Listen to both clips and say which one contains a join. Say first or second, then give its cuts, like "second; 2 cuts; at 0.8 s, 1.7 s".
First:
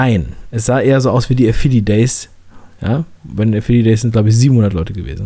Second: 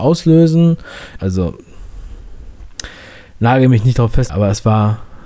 second; 2 cuts; at 1.2 s, 4.3 s